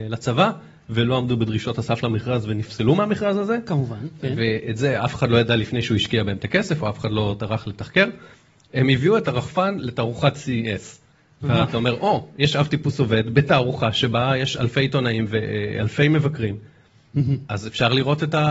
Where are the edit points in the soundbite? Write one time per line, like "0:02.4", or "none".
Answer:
none